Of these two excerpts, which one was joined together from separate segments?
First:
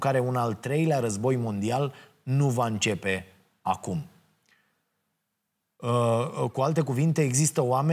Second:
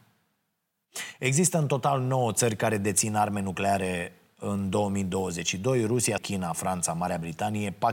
second; 1 cut; at 6.2 s

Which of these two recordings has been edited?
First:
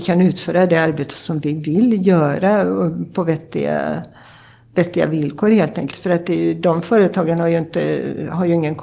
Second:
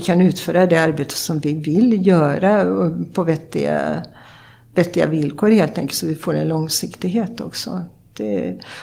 first; 1 cut; at 5.9 s

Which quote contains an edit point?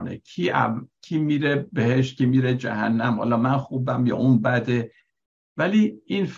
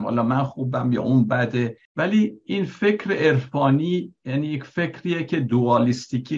second; 1 cut; at 1.9 s

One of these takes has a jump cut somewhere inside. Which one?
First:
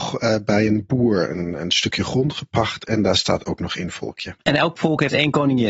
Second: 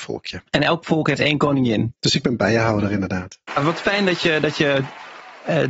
second; 2 cuts; at 1.9 s, 3.5 s

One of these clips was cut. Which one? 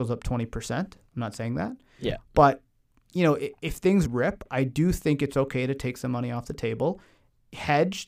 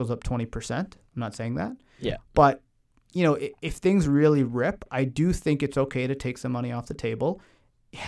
first; 1 cut; at 4.1 s

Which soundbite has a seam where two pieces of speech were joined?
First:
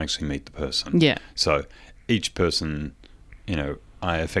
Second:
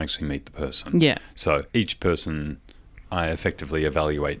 second; 2 cuts; at 1.7 s, 3.0 s

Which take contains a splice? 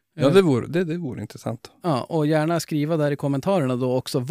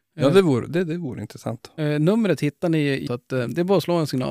second; 2 cuts; at 1.8 s, 3.1 s

